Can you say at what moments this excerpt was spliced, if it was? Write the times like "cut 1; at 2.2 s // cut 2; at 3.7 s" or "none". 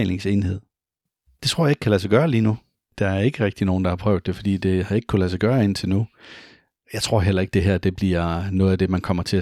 cut 1; at 1.3 s